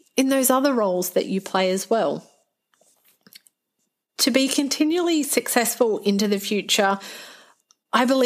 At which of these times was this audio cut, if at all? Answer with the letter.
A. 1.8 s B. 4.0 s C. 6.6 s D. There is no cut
D